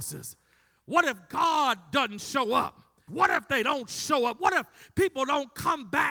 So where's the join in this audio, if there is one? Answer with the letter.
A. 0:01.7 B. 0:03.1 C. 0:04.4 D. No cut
B